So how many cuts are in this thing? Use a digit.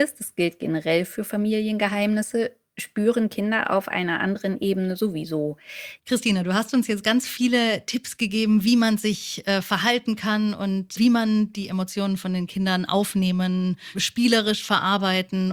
3